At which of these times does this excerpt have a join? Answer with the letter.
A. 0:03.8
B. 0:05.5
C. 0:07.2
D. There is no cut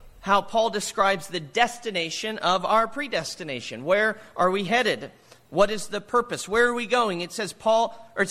D